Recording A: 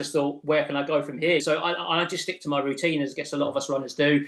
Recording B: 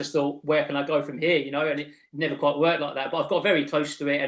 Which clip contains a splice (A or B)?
A